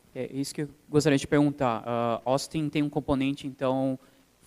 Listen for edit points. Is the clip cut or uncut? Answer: uncut